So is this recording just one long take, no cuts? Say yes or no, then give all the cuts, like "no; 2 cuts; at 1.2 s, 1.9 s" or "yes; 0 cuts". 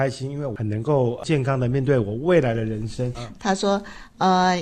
no; 1 cut; at 3.1 s